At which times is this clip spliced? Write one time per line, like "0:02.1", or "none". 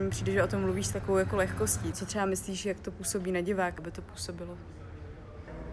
0:01.9
0:03.8